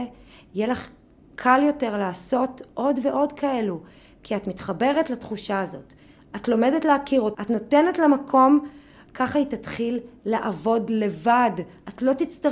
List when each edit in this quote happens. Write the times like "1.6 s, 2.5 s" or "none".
7.3 s, 9.1 s